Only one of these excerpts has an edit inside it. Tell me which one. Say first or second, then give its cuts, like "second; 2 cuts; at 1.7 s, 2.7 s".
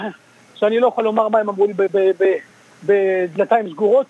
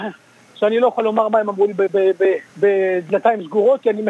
second; 1 cut; at 2.5 s